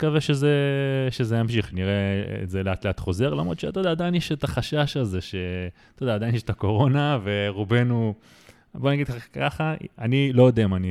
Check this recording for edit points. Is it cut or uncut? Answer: uncut